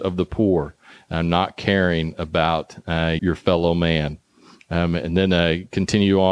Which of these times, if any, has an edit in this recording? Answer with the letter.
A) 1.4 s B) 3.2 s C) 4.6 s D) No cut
B